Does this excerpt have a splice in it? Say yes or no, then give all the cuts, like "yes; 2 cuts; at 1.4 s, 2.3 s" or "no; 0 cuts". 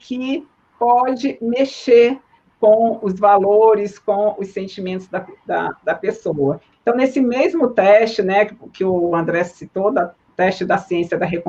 yes; 1 cut; at 6.7 s